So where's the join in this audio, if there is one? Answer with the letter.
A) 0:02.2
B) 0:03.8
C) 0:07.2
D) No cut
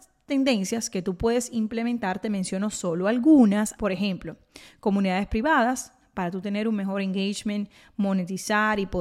B